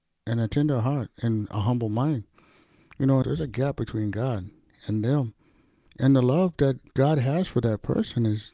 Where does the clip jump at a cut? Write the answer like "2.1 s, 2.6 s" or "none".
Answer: 3.2 s, 6.9 s

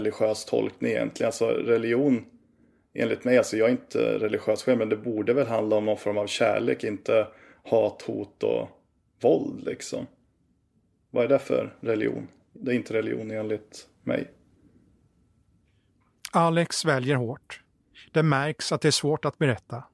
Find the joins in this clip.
none

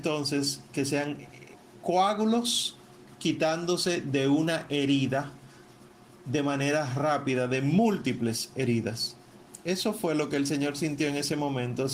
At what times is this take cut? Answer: none

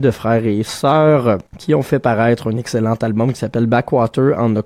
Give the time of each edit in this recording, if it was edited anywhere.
1.5 s

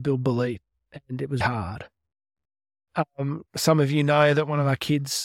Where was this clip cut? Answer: 1.4 s, 3.5 s

